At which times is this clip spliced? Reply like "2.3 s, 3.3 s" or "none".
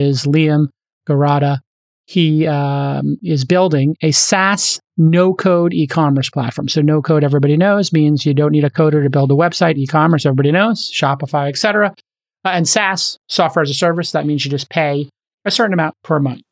none